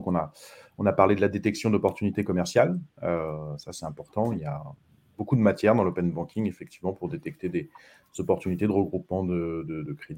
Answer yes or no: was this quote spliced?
no